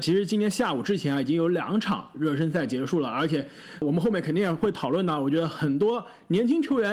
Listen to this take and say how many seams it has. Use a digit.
0